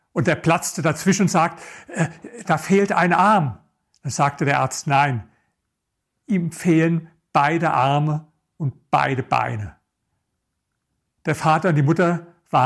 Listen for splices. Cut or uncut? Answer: cut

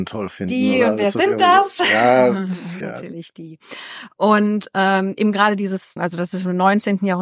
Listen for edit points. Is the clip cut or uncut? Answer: cut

